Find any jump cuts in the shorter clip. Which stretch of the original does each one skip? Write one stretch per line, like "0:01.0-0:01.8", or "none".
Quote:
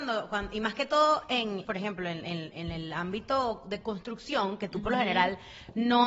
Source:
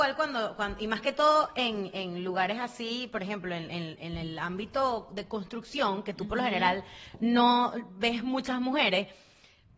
0:01.9-0:03.1